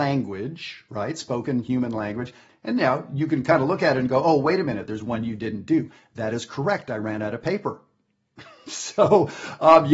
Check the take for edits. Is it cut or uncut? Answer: cut